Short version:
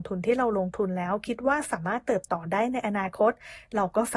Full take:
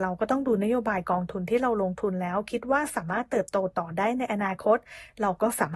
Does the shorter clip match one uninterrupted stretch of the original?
no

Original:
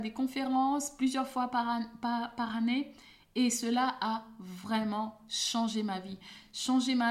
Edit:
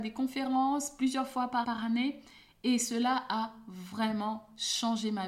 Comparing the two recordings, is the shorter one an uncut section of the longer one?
no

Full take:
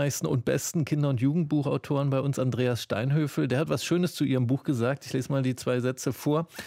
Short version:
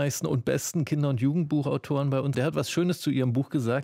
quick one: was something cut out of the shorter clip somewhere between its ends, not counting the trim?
yes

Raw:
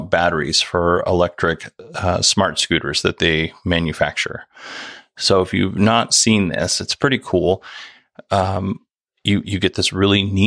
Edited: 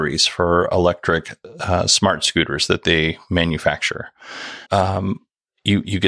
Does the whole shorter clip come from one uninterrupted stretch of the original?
no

